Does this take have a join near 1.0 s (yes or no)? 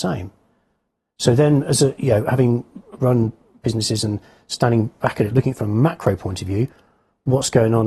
no